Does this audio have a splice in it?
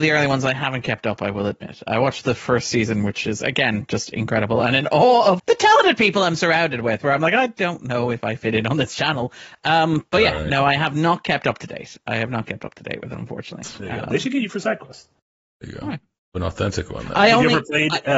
yes; 1 cut; at 5.4 s

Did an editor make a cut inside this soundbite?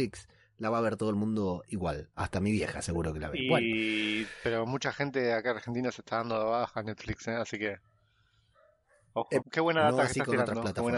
yes; 1 cut; at 9.4 s

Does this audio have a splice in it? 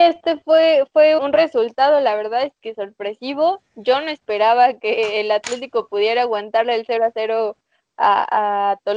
yes; 1 cut; at 1.2 s

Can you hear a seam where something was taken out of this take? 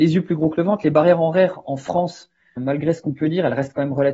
yes; 1 cut; at 2.6 s

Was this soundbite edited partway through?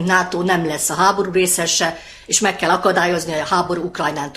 no; 0 cuts

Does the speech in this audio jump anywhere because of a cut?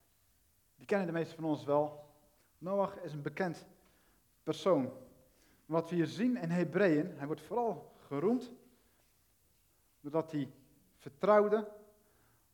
yes; 1 cut; at 2.4 s

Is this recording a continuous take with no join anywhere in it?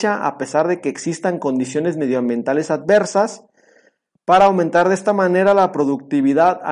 yes; 0 cuts

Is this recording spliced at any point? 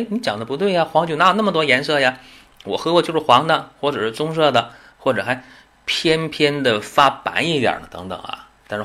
no; 0 cuts

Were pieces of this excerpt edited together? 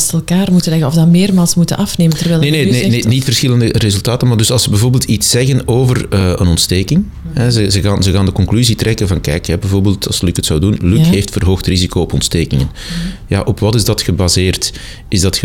no; 0 cuts

